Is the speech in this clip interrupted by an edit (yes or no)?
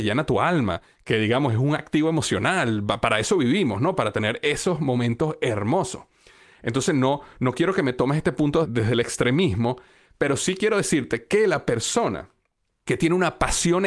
no